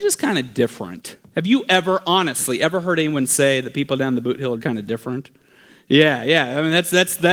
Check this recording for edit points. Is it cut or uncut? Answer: cut